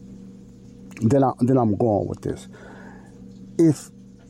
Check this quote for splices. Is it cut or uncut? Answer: uncut